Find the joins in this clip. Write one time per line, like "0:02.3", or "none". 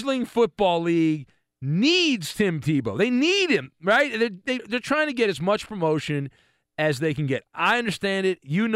0:04.6